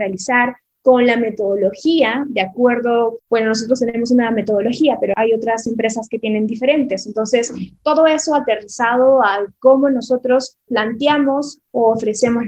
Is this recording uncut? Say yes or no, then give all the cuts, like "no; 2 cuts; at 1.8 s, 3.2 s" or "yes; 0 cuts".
yes; 0 cuts